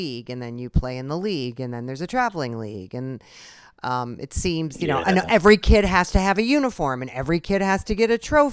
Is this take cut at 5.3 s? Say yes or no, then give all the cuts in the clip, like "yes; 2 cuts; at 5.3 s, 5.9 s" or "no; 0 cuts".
no; 0 cuts